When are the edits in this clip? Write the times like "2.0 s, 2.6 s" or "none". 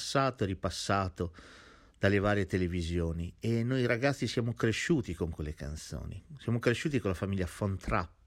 none